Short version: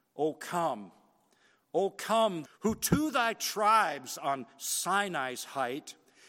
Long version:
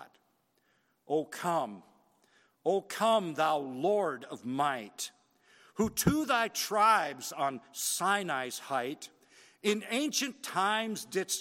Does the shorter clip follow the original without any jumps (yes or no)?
no